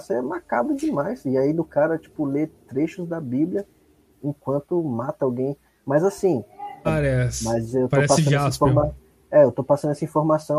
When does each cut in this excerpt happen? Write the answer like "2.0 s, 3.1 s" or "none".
6.8 s